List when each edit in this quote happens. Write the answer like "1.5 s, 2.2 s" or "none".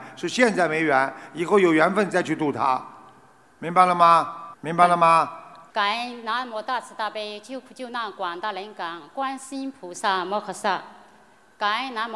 4.5 s, 5.7 s